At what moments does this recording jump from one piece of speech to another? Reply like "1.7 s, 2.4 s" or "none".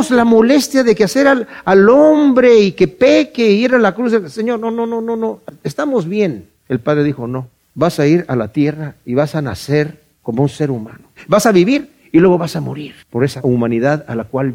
13.0 s